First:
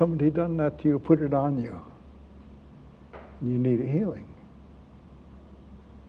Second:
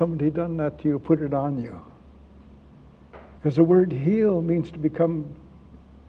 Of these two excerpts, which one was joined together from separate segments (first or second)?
second